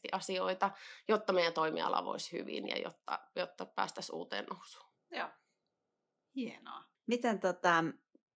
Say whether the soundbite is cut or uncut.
cut